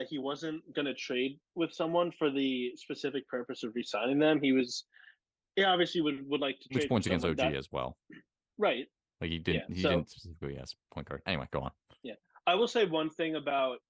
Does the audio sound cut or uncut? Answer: cut